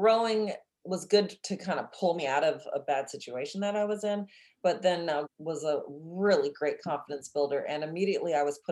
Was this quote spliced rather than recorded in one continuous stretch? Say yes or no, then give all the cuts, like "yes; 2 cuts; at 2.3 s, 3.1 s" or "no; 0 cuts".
yes; 1 cut; at 5.2 s